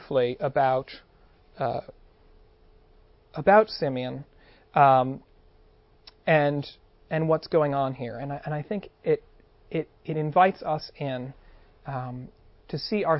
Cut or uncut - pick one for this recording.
uncut